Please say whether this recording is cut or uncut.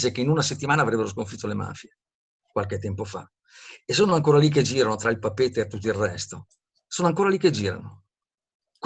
uncut